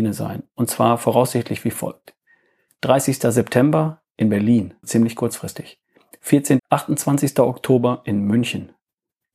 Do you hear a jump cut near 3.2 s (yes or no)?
no